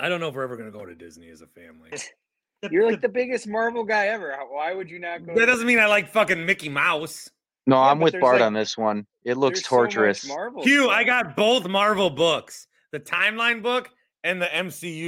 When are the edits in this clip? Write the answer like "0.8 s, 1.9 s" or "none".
1.9 s